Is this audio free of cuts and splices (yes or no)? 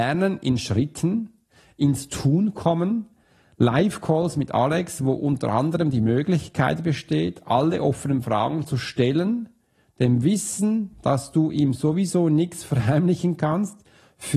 yes